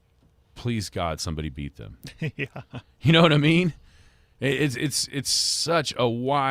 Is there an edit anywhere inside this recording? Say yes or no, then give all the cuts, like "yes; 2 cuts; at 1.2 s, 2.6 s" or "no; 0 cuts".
no; 0 cuts